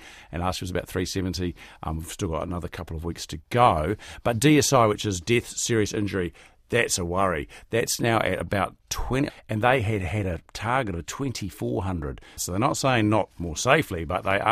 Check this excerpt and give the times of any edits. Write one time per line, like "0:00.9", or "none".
0:09.3
0:12.4

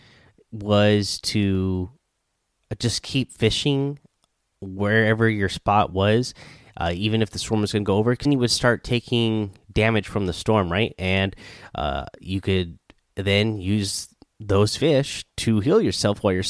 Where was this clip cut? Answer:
0:08.3

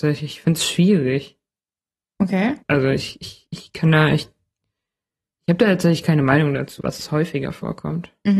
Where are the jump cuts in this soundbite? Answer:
0:02.6
0:06.8

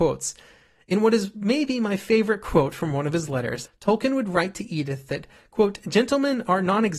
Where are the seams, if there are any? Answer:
0:03.6

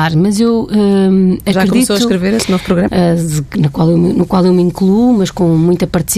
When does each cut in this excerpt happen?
0:02.9

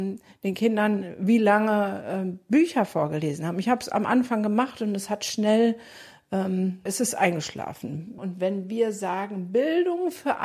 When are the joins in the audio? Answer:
0:06.9
0:08.2

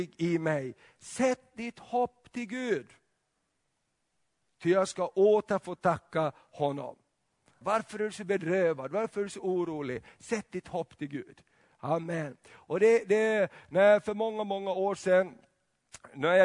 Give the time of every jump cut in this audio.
0:07.6

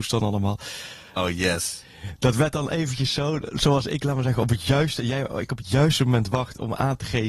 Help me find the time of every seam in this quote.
0:01.2

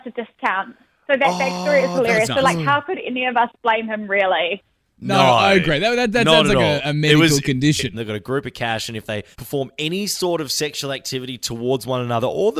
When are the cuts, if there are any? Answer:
0:07.9
0:09.3

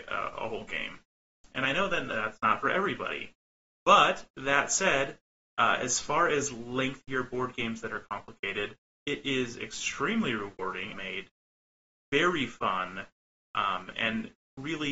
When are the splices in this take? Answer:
0:10.9

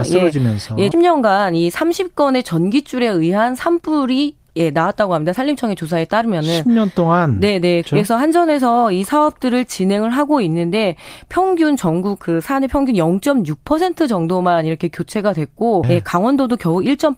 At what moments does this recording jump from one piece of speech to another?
0:00.9
0:07.8
0:15.8

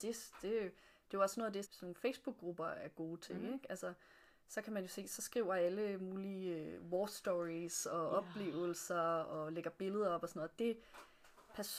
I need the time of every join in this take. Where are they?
0:01.6

